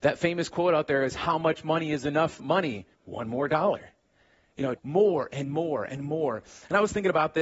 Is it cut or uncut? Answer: cut